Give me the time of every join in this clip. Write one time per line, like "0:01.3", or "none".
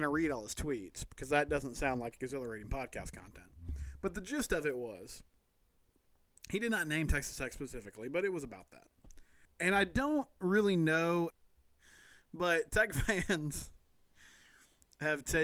0:09.5
0:11.3